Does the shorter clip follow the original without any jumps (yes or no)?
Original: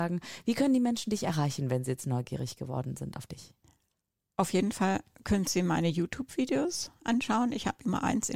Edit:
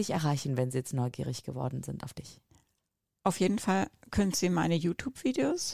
yes